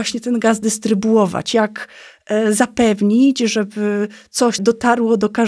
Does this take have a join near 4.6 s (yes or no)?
yes